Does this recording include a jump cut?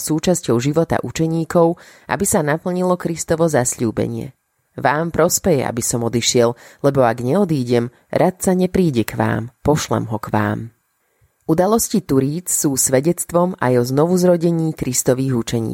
yes; 1 cut; at 9.6 s

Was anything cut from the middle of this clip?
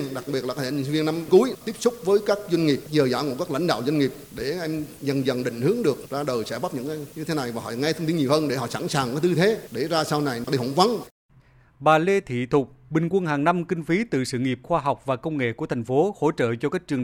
yes; 1 cut; at 12.9 s

